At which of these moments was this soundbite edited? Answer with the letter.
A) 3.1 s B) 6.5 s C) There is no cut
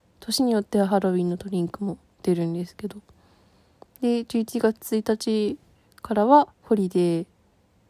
B